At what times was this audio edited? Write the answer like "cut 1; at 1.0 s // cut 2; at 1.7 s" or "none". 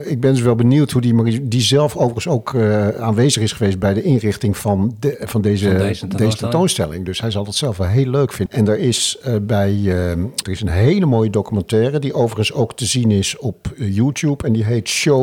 cut 1; at 8.5 s // cut 2; at 10.4 s